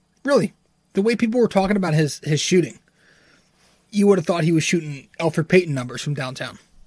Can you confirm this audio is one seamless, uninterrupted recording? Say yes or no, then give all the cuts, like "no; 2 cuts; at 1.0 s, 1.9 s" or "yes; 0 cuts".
yes; 0 cuts